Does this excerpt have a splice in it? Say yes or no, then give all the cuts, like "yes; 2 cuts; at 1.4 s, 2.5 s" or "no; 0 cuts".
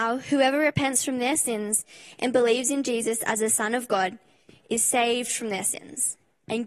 no; 0 cuts